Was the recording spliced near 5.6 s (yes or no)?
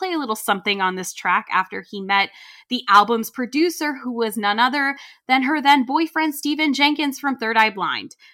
no